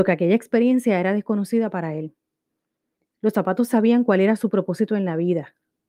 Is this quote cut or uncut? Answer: uncut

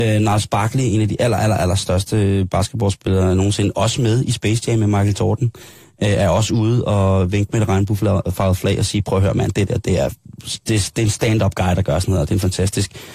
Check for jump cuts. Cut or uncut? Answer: uncut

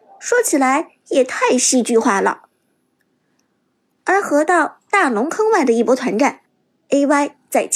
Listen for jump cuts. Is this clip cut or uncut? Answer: uncut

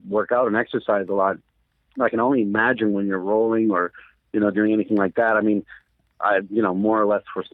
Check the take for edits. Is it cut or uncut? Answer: uncut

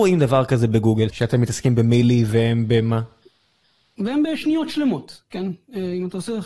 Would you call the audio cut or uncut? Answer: cut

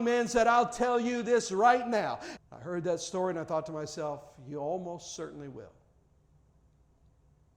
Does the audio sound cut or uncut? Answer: cut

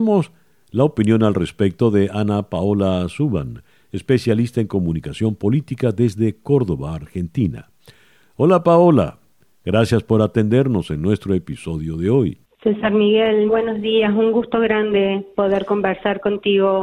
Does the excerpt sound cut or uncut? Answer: cut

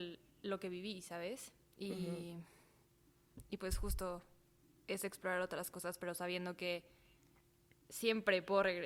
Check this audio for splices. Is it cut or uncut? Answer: uncut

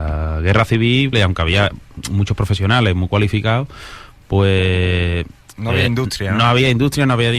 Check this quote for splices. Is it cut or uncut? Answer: cut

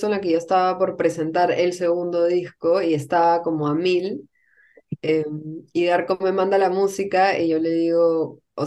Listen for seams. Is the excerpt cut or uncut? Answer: uncut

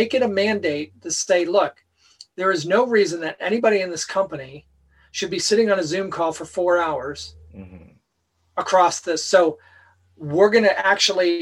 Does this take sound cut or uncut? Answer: uncut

